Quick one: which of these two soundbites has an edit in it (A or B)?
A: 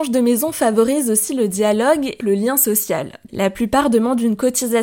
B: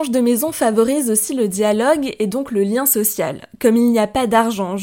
A